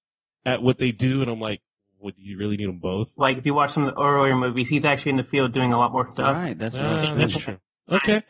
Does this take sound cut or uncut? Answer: cut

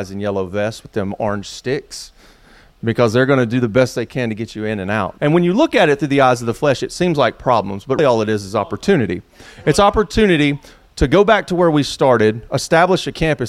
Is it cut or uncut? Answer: cut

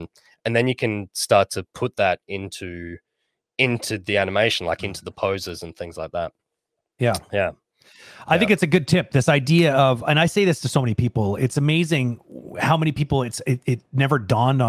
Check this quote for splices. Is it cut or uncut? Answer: uncut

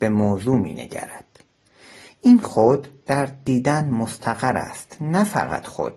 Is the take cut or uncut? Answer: uncut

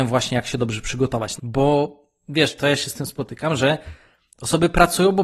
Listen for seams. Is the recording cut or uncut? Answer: cut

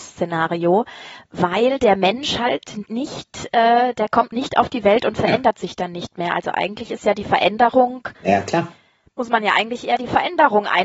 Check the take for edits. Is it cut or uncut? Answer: uncut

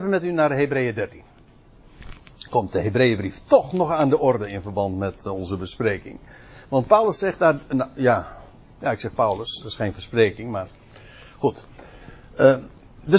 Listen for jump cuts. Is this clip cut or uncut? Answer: uncut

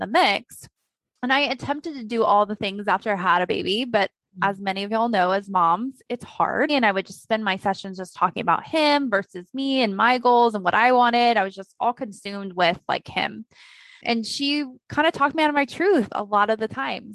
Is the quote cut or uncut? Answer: cut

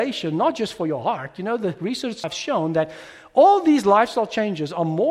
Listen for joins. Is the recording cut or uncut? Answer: cut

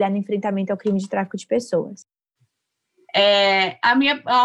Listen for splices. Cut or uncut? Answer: cut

